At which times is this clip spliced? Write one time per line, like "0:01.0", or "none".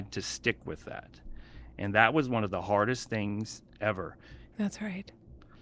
0:04.5